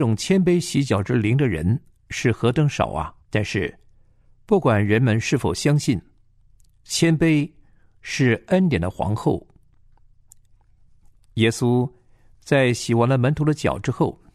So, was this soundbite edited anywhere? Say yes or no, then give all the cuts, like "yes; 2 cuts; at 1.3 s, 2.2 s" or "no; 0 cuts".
yes; 2 cuts; at 3.2 s, 10.5 s